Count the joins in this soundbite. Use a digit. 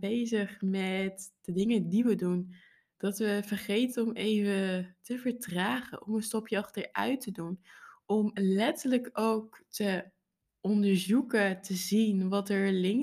0